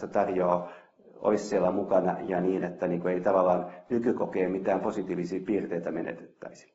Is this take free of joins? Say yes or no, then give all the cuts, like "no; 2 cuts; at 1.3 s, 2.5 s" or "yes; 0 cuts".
yes; 0 cuts